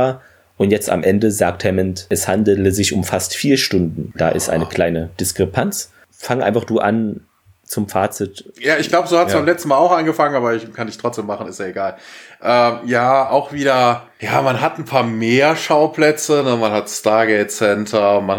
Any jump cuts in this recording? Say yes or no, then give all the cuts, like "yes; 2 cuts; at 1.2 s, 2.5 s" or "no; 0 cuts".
yes; 1 cut; at 6.0 s